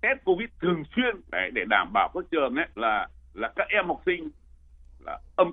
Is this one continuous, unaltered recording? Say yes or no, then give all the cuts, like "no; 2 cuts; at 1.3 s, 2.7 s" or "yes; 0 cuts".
no; 2 cuts; at 1.2 s, 2.7 s